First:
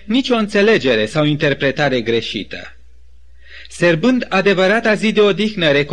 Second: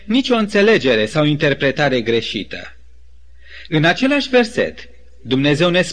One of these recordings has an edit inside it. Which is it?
second; 1 cut; at 3.7 s

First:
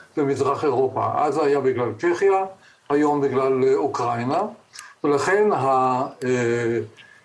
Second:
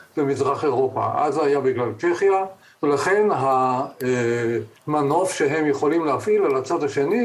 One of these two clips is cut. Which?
second; 2 cuts; at 2.7 s, 4.8 s

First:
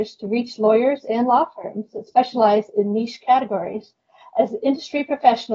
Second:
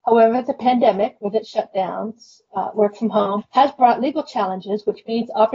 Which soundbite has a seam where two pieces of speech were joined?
second; 1 cut; at 3.4 s

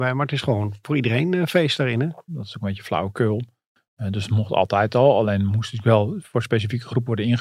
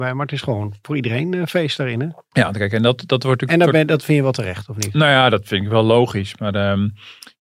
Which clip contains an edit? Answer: first; 1 cut; at 2.3 s

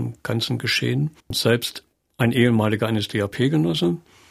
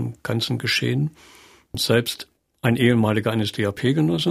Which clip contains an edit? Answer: first; 1 cut; at 1.2 s

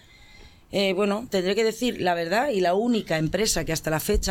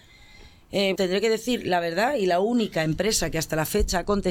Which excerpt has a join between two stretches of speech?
second; 1 cut; at 0.9 s

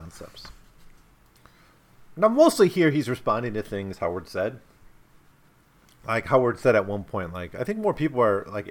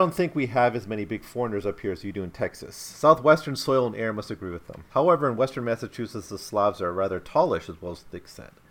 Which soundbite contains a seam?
second; 1 cut; at 4.9 s

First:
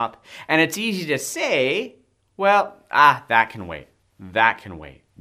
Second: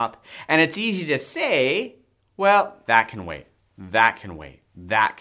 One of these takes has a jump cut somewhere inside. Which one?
second; 1 cut; at 2.8 s

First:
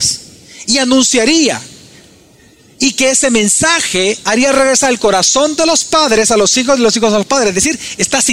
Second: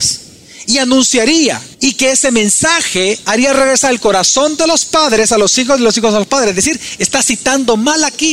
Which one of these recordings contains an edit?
second; 1 cut; at 1.7 s

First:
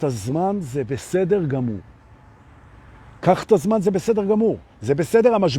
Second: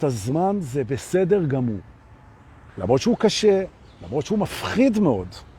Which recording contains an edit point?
second; 1 cut; at 2.7 s

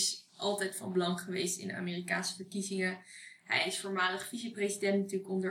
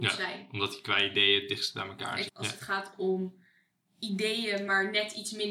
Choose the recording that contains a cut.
second; 1 cut; at 2.3 s

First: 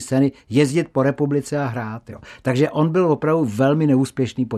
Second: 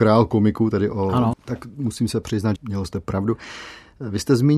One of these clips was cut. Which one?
second; 2 cuts; at 1.3 s, 2.6 s

